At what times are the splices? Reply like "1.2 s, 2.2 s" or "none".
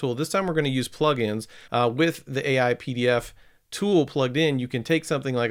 1.7 s